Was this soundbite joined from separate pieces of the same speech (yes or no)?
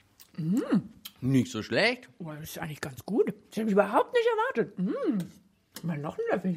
no